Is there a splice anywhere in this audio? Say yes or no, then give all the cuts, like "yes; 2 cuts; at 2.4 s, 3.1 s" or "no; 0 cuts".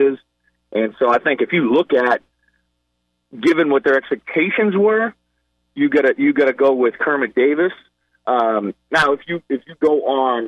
no; 0 cuts